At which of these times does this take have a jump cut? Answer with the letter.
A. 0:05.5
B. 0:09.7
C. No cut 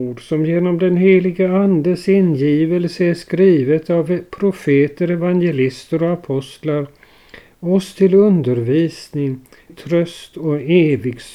B